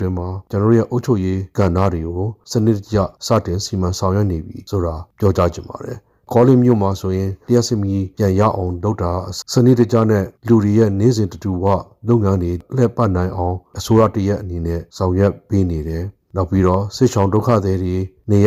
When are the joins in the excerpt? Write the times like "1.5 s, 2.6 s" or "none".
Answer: 9.4 s